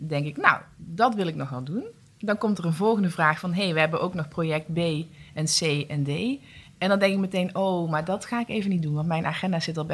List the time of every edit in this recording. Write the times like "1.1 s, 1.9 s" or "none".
none